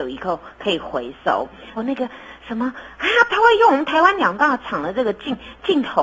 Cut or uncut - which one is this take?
cut